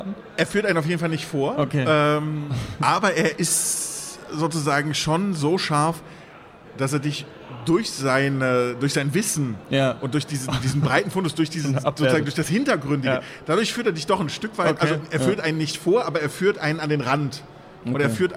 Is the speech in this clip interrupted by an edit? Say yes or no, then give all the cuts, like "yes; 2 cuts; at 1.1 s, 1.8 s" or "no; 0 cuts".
no; 0 cuts